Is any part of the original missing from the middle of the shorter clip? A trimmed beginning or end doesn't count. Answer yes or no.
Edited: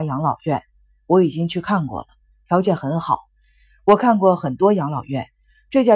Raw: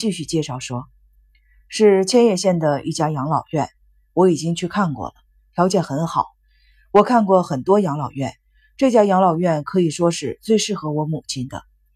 no